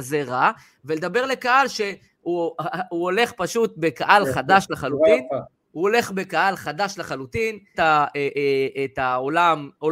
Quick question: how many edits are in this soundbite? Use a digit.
3